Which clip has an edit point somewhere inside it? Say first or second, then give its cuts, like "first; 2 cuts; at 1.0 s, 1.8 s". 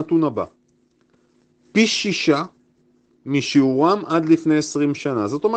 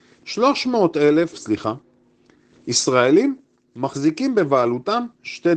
second; 1 cut; at 1.3 s